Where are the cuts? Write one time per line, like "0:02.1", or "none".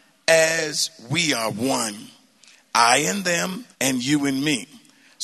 0:03.7